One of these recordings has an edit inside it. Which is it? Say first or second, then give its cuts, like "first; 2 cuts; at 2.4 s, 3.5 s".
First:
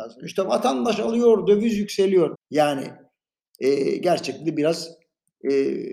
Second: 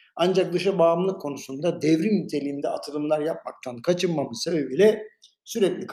first; 1 cut; at 2.3 s